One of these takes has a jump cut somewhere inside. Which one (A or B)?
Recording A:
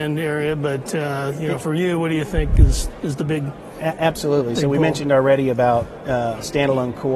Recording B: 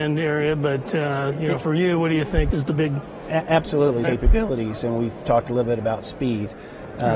B